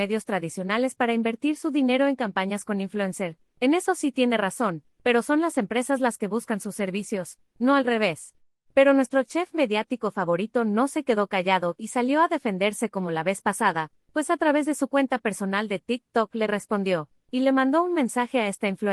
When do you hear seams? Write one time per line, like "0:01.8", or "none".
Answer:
0:08.5